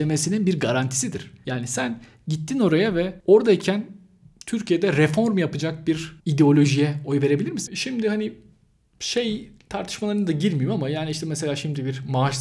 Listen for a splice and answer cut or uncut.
cut